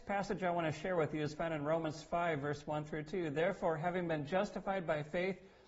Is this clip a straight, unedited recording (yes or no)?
yes